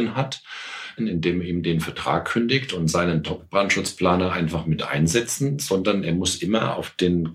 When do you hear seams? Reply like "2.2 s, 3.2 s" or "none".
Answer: 1.0 s